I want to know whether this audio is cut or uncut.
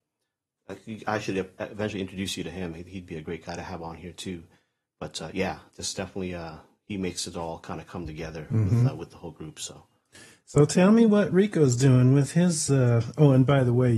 uncut